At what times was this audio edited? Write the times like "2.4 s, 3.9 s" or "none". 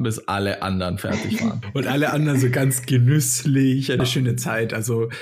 4.0 s